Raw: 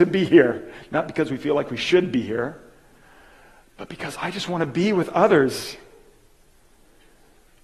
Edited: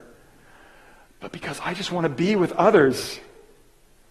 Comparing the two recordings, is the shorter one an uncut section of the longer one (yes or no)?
yes